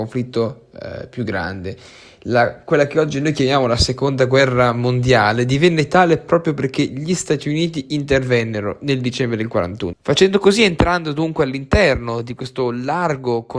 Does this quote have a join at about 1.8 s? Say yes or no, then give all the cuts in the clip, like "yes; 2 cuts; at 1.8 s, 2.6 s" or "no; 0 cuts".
no; 1 cut; at 9.9 s